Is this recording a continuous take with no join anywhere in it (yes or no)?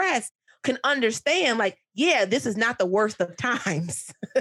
yes